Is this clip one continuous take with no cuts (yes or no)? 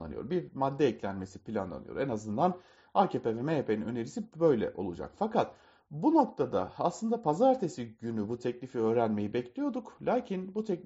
yes